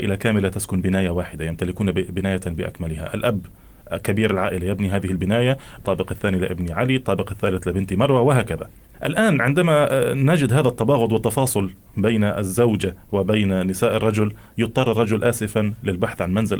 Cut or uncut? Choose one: cut